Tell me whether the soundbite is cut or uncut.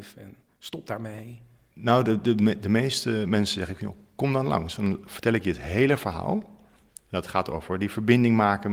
uncut